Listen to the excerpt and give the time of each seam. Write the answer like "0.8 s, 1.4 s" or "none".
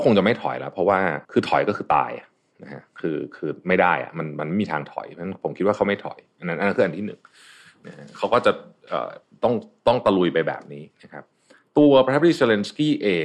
1.2 s